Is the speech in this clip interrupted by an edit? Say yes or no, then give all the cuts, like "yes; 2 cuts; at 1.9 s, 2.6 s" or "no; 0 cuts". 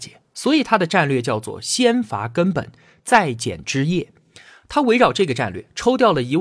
no; 0 cuts